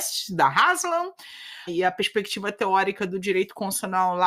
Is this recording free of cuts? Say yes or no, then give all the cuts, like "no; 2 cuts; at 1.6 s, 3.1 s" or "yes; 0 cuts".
no; 1 cut; at 1.7 s